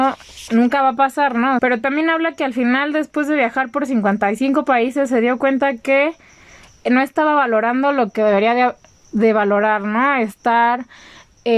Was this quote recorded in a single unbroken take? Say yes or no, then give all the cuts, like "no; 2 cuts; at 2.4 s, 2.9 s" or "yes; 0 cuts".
no; 1 cut; at 1.6 s